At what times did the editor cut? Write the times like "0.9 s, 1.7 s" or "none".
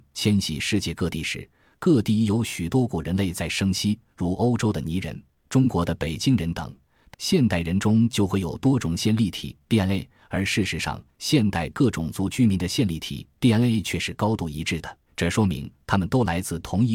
7.1 s, 15.1 s